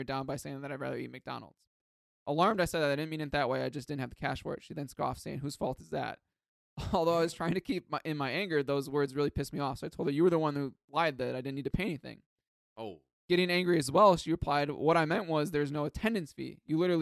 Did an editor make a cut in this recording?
no; 0 cuts

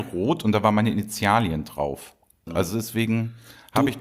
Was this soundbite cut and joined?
yes; 1 cut; at 2.5 s

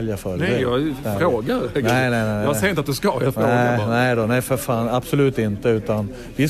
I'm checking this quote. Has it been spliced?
no; 0 cuts

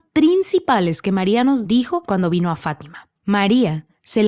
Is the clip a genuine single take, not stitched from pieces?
no; 1 cut; at 3.2 s

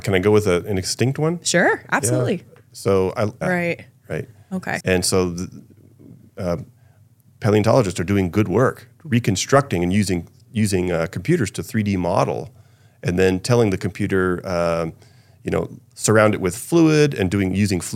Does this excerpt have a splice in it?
yes; 2 cuts; at 3.4 s, 4.8 s

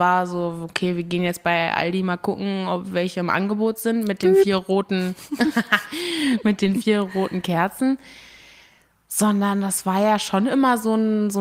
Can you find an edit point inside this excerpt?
no; 0 cuts

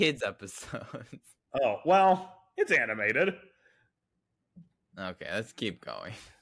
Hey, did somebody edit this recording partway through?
no; 0 cuts

